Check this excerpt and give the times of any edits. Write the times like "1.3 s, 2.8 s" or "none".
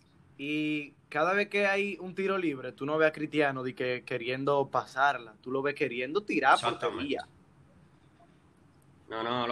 none